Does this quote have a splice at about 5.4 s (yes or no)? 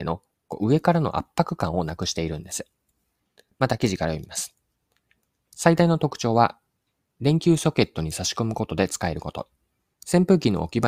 no